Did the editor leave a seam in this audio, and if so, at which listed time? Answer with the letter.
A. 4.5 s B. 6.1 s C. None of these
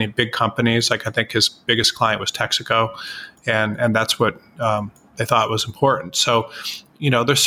C